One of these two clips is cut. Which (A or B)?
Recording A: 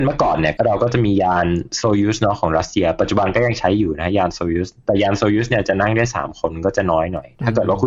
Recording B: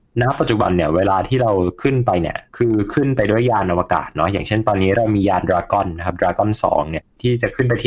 B